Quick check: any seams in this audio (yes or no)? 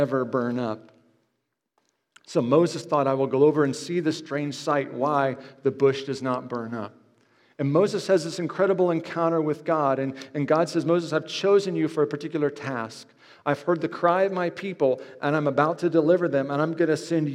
no